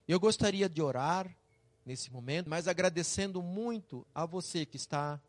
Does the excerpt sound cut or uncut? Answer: cut